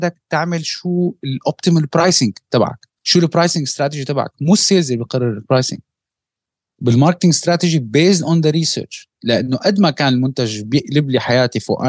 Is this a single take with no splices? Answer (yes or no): no